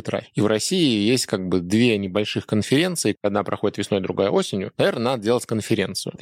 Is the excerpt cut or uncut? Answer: uncut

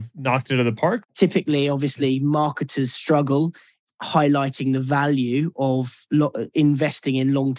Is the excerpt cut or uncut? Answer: cut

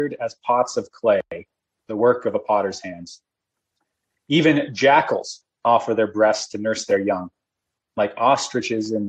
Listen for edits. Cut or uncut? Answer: cut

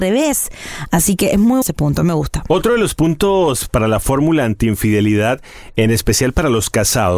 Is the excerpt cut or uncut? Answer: cut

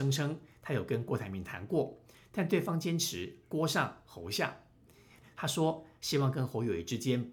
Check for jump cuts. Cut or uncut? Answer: cut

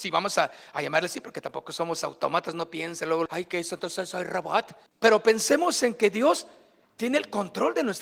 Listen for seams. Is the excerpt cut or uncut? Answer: cut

